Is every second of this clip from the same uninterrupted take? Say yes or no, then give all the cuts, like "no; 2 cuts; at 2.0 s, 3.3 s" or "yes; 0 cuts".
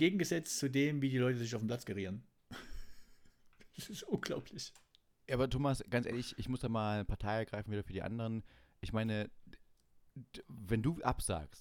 yes; 0 cuts